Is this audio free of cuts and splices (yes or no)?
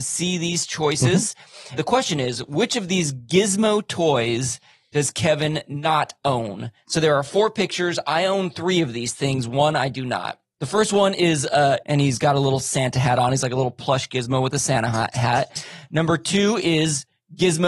no